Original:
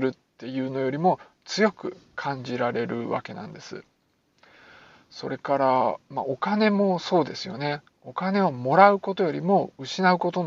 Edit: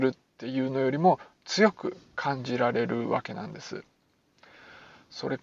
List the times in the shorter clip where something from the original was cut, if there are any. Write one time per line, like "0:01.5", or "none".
none